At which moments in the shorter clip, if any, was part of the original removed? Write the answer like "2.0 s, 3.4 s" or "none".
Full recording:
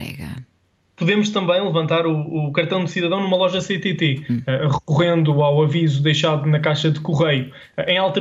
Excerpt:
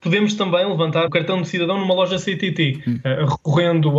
1.1 s